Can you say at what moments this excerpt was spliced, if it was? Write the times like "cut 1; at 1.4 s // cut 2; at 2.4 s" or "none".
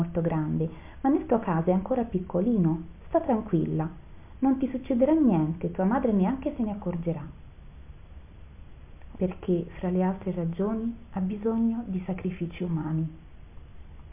cut 1; at 9.1 s